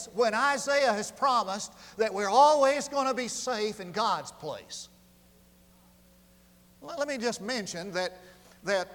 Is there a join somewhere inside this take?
no; 0 cuts

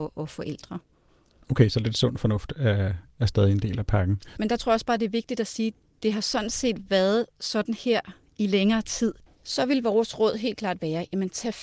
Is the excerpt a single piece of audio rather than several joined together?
no; 2 cuts; at 4.4 s, 9.3 s

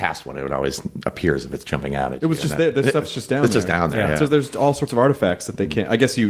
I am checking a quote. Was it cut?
no; 0 cuts

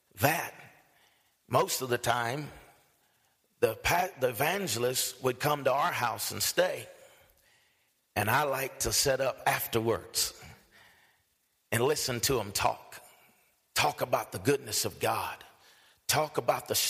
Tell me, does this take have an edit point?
no; 0 cuts

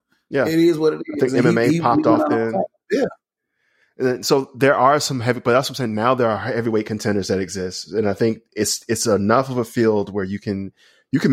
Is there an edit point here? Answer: no; 0 cuts

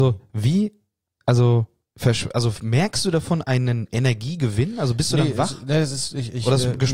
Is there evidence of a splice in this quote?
no; 0 cuts

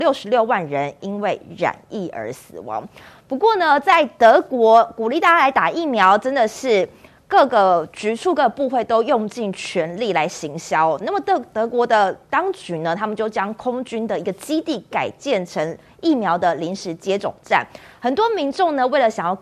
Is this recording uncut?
yes; 0 cuts

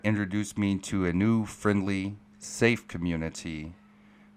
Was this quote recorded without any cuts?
yes; 0 cuts

